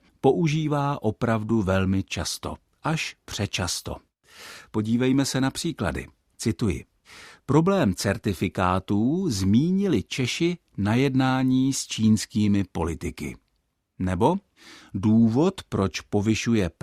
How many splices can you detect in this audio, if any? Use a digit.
0